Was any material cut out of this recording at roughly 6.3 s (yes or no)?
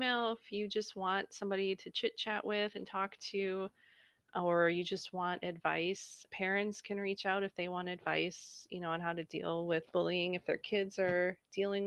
yes